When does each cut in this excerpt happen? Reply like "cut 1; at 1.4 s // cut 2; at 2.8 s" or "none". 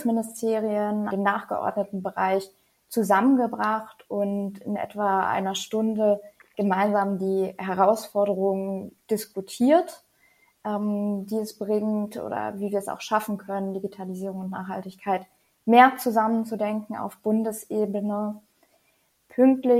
cut 1; at 1.1 s